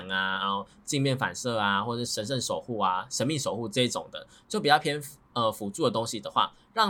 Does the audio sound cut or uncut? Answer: cut